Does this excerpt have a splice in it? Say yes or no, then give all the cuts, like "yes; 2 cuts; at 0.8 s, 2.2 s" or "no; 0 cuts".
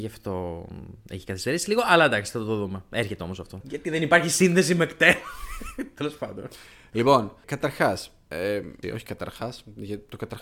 yes; 3 cuts; at 3.6 s, 7.4 s, 8.8 s